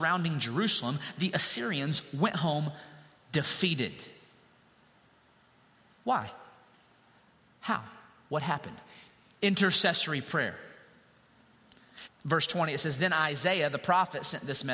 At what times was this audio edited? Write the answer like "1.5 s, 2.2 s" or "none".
12.1 s